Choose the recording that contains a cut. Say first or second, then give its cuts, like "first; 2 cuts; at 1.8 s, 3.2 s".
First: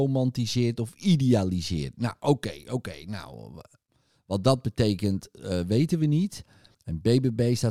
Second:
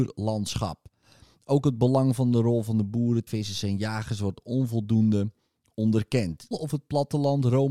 second; 2 cuts; at 3.3 s, 6.5 s